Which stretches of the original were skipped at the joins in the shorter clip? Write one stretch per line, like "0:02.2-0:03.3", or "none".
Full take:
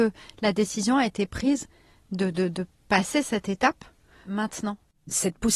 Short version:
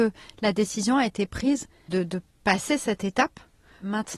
0:01.9-0:02.3